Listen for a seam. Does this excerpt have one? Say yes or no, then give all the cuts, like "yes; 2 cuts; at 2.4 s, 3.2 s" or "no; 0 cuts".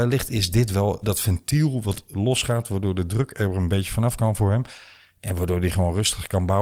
yes; 1 cut; at 1.0 s